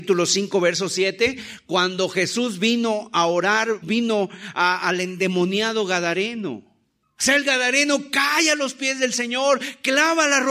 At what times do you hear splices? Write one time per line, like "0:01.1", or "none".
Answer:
0:03.8
0:07.0